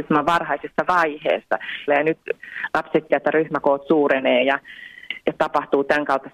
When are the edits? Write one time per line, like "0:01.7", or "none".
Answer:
0:01.9
0:03.1
0:05.2